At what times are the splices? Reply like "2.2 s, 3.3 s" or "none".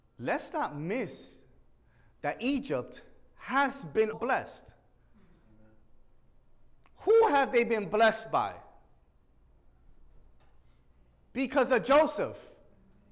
4.1 s